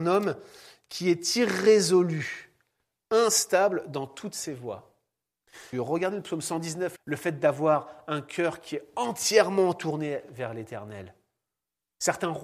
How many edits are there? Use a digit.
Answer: 2